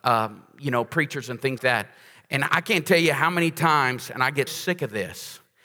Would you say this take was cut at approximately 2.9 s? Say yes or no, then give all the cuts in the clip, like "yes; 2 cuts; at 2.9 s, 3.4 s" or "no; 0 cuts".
no; 2 cuts; at 1.6 s, 4.5 s